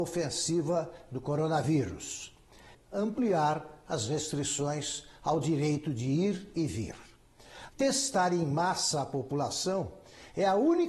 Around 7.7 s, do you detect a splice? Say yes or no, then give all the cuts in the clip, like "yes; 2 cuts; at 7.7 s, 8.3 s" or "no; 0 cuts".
yes; 2 cuts; at 2.7 s, 7.7 s